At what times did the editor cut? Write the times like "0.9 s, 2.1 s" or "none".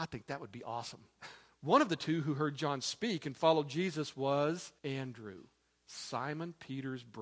1.5 s, 4.8 s